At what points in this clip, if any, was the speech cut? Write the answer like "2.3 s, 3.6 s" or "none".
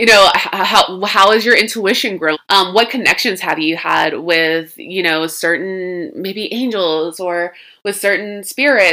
2.3 s